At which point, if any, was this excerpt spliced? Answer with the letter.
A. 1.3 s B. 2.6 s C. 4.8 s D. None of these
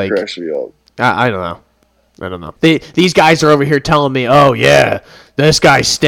B